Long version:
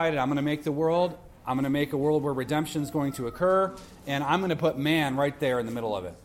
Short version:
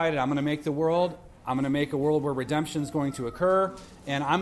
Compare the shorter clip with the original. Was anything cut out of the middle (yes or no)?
no